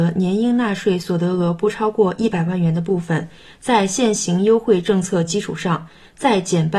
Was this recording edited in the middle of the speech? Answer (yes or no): no